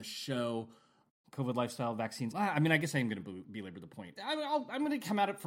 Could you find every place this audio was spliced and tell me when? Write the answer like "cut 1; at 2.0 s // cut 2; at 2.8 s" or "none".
cut 1; at 1.2 s // cut 2; at 2.3 s // cut 3; at 4.2 s